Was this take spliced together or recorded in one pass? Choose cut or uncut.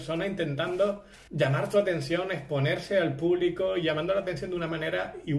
cut